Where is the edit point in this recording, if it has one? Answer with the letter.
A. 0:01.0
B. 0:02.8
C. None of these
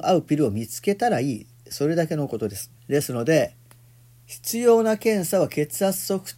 B